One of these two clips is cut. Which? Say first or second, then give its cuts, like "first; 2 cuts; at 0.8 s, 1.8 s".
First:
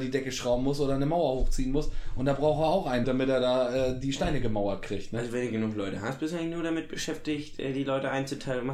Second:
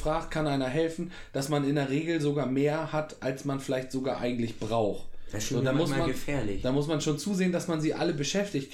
first; 1 cut; at 3.0 s